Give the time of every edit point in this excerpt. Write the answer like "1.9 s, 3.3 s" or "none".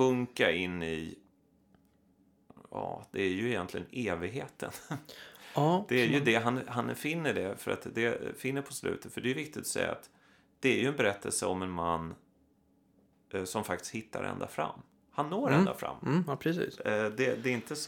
none